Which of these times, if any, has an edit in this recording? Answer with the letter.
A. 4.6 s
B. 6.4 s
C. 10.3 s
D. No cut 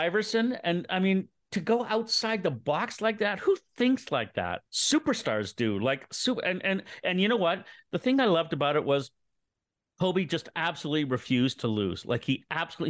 A